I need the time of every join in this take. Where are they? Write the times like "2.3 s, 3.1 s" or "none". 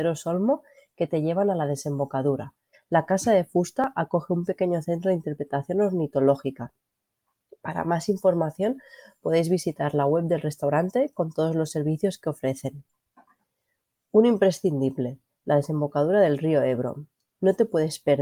2.7 s